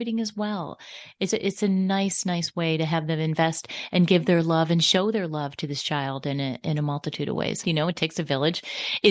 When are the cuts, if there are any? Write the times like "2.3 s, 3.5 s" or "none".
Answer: 1.3 s, 7.6 s